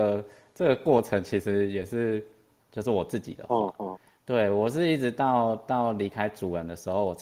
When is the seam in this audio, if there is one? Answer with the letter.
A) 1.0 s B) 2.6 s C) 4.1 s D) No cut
B